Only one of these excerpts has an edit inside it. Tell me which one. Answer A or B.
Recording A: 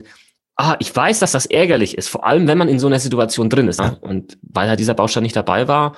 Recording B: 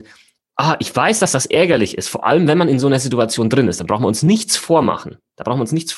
A